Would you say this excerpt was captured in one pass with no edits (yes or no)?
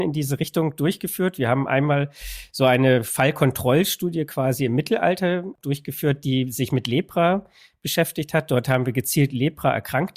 yes